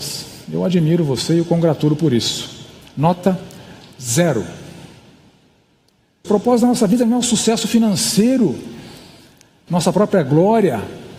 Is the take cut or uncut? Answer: cut